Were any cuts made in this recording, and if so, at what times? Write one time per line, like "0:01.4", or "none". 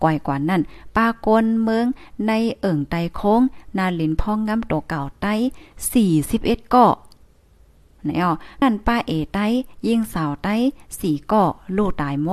0:08.6